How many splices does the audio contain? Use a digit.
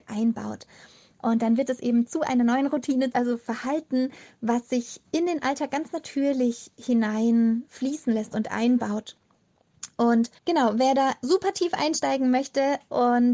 2